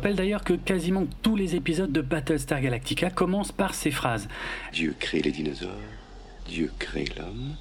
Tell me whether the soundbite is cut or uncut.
cut